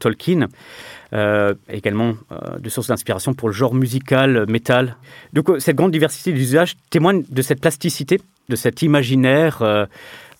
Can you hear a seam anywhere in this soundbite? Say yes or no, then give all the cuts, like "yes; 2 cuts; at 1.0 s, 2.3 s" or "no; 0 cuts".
yes; 1 cut; at 8.5 s